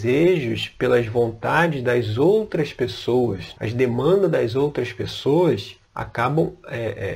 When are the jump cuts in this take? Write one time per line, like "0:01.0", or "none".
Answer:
0:03.5
0:05.8